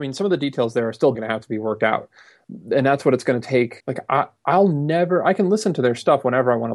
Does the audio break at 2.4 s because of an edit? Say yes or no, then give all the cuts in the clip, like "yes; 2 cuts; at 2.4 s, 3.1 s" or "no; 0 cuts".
no; 2 cuts; at 1.1 s, 3.8 s